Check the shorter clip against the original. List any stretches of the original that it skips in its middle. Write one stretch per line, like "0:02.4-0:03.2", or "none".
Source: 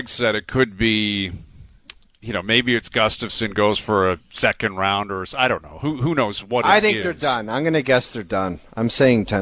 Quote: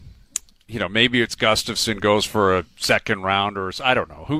none